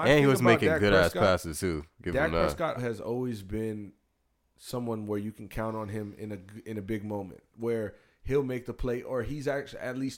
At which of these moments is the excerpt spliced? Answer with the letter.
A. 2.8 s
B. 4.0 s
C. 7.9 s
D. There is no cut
A